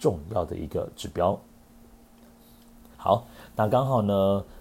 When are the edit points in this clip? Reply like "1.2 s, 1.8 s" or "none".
2.9 s